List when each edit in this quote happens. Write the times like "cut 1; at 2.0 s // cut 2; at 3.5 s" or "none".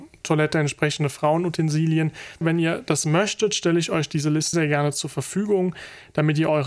cut 1; at 2.4 s // cut 2; at 4.5 s